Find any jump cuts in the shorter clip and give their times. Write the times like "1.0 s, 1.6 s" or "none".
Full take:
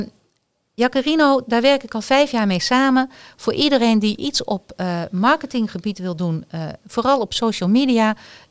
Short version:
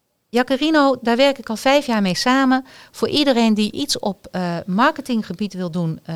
none

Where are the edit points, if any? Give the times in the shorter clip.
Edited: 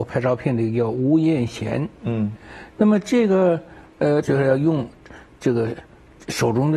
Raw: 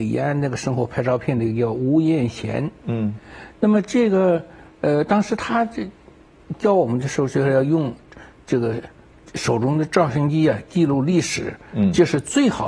4.2 s

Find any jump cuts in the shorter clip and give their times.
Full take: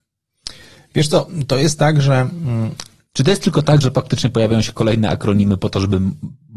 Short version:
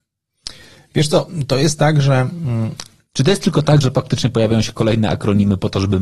none

